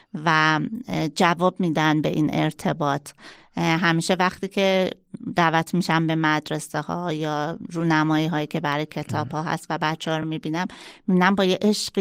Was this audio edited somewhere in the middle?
no; 0 cuts

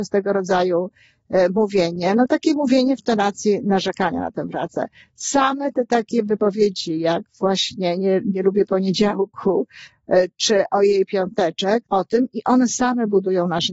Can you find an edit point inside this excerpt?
yes; 1 cut; at 11.8 s

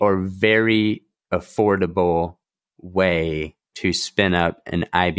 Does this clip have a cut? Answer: yes; 1 cut; at 3.6 s

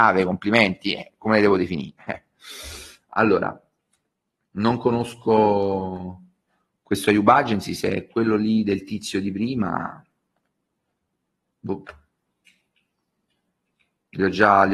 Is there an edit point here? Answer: no; 0 cuts

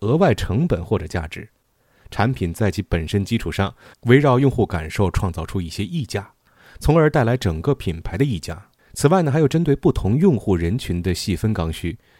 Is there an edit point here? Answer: yes; 1 cut; at 8.8 s

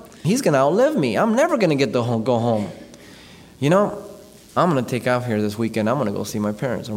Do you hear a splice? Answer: no; 0 cuts

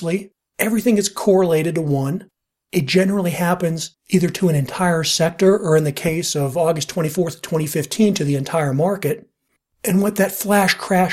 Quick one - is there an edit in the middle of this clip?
no; 0 cuts

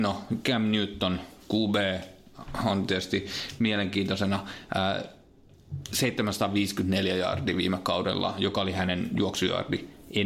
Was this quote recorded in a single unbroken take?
yes; 0 cuts

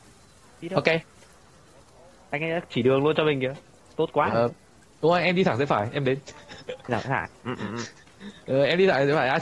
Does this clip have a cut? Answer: no; 0 cuts

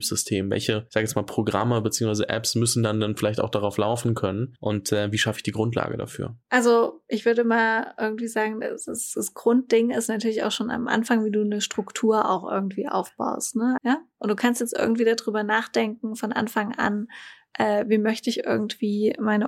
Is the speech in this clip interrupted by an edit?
yes; 1 cut; at 13.8 s

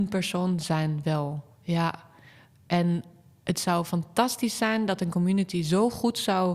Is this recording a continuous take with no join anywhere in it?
yes; 0 cuts

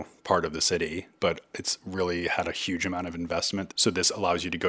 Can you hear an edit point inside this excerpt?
yes; 2 cuts; at 1.2 s, 3.7 s

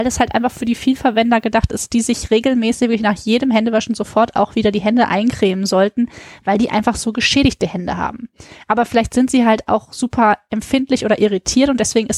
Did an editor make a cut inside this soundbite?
no; 0 cuts

